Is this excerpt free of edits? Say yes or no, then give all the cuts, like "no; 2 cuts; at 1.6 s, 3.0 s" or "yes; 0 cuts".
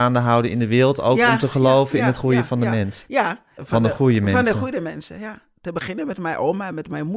no; 1 cut; at 3.6 s